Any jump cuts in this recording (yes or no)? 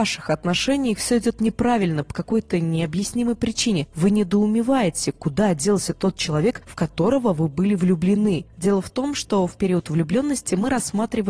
no